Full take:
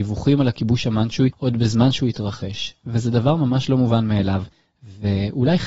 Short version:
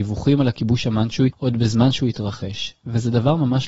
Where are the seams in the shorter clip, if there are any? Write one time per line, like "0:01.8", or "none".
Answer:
none